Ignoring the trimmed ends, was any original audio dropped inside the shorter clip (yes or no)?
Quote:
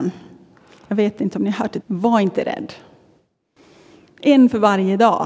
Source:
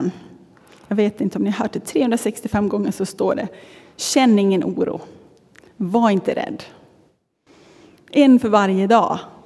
yes